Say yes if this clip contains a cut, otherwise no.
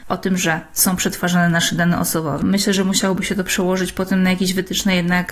yes